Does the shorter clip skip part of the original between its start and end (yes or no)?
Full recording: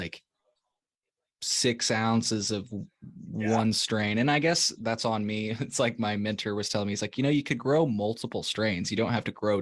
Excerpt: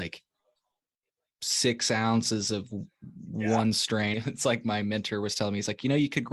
yes